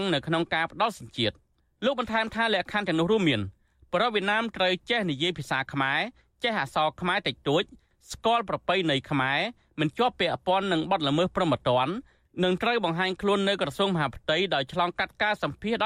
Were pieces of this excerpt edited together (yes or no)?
no